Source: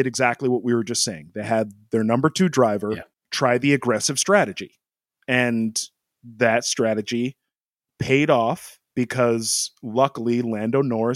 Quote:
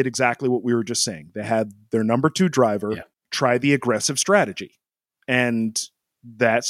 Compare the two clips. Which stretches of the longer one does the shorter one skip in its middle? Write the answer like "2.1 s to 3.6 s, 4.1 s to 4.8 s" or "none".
none